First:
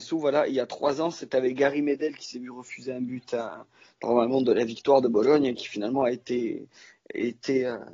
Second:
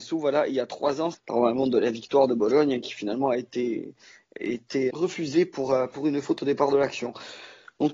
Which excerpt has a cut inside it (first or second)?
second